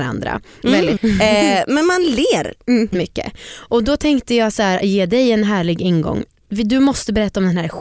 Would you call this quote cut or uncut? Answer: cut